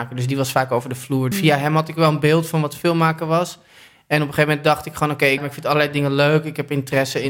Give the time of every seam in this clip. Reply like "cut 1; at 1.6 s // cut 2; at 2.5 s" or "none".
cut 1; at 1.3 s // cut 2; at 5.4 s